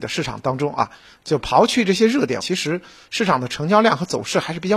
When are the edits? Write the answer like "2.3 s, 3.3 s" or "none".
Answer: 2.4 s